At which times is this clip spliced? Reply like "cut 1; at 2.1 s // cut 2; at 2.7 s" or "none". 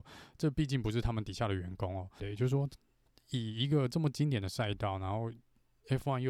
cut 1; at 2.2 s